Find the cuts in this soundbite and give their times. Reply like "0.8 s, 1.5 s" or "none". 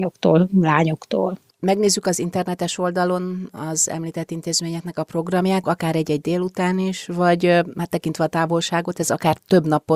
1.5 s, 5.6 s